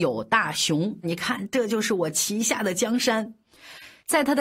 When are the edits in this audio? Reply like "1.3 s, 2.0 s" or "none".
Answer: 1.0 s